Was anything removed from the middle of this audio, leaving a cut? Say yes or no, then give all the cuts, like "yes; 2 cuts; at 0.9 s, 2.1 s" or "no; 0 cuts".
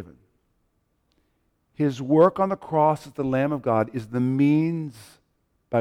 no; 0 cuts